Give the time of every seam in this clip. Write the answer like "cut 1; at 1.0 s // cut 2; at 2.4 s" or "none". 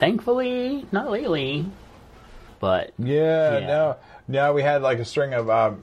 cut 1; at 2.5 s